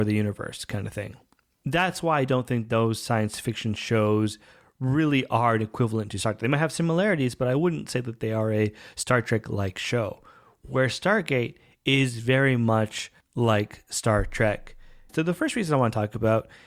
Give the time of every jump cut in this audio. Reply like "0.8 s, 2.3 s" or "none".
15.1 s